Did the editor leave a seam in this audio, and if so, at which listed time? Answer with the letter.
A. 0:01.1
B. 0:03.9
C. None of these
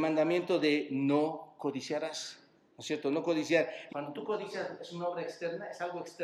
B